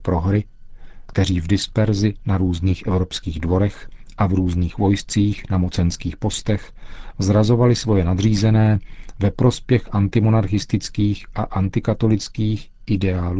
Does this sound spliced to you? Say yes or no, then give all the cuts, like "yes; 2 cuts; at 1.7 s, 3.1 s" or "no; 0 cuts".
yes; 1 cut; at 1.1 s